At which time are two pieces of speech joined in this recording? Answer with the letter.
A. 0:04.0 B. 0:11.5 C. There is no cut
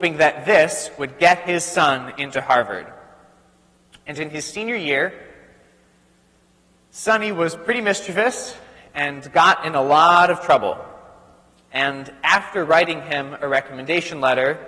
C